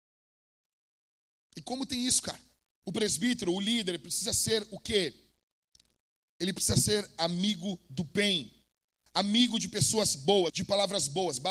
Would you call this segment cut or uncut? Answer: cut